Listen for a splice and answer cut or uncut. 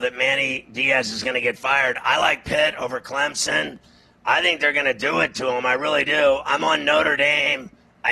uncut